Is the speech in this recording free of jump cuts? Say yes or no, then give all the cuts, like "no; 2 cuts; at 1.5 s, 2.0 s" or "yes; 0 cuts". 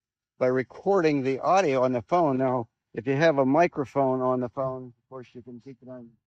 yes; 0 cuts